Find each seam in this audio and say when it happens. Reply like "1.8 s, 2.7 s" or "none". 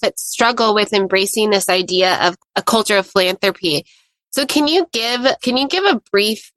5.4 s